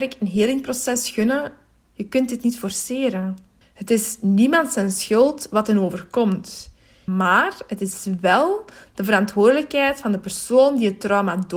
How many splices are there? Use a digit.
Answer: 3